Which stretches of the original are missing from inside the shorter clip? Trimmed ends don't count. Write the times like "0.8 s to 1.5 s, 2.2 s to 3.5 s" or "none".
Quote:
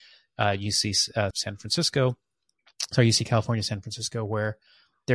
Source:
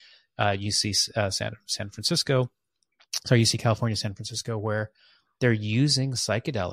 1.3 s to 1.6 s